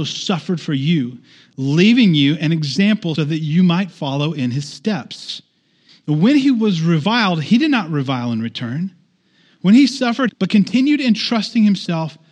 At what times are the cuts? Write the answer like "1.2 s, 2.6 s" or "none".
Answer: 3.2 s, 5.9 s, 10.3 s